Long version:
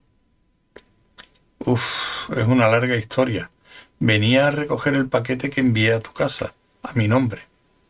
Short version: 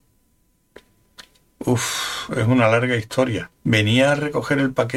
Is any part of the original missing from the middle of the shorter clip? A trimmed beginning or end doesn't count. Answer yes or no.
yes